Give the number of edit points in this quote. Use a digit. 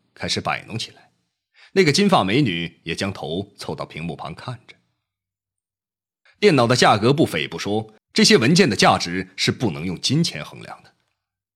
2